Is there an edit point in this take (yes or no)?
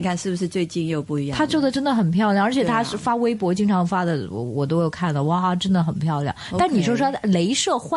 no